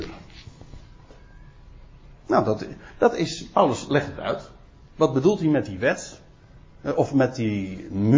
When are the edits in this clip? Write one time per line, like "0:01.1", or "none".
none